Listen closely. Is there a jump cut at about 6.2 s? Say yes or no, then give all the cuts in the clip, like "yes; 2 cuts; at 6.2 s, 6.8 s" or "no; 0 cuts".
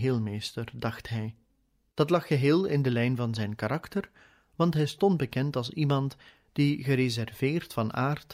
no; 1 cut; at 1.9 s